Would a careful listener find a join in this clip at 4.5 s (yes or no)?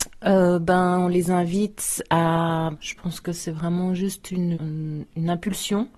yes